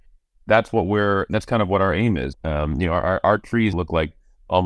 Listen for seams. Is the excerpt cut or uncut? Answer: cut